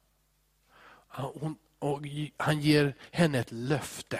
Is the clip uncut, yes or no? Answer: yes